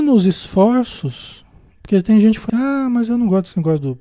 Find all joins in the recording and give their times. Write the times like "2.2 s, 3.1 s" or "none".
2.5 s

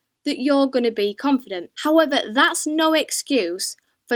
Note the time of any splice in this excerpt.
1.7 s

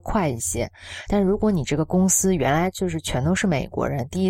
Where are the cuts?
none

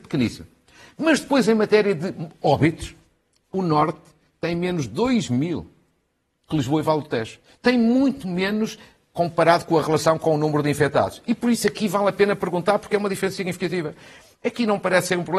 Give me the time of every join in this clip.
none

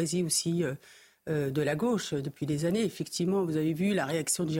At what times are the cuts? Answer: none

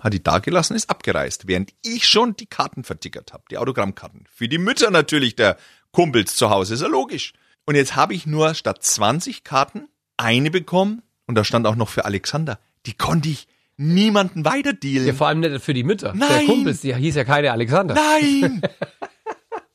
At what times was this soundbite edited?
none

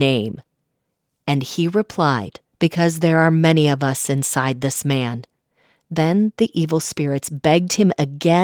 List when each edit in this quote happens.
2.5 s

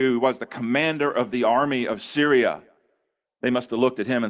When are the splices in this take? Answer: 3.3 s

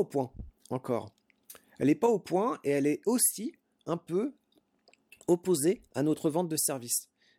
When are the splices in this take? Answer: none

